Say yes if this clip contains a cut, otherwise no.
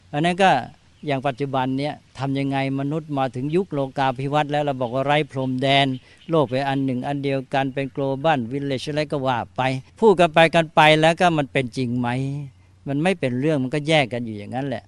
yes